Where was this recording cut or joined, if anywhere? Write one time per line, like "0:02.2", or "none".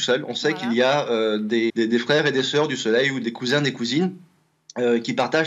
0:01.7
0:03.2